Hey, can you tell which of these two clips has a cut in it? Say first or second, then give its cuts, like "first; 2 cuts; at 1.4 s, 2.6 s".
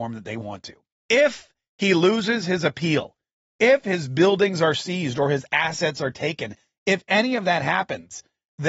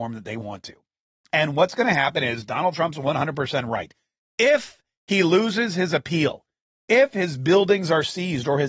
first; 1 cut; at 0.9 s